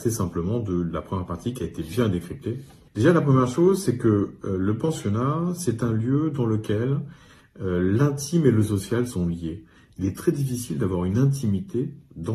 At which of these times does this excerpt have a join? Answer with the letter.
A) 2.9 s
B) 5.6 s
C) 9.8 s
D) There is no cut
A